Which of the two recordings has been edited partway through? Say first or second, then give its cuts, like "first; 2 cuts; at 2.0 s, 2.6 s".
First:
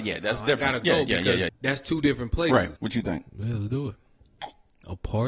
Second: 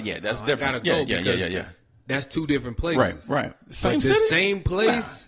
first; 2 cuts; at 1.5 s, 2.8 s